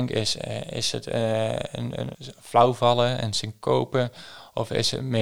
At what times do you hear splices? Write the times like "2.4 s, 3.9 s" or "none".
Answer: 2.1 s